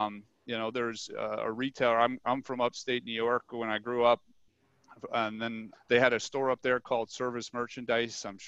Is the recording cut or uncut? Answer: cut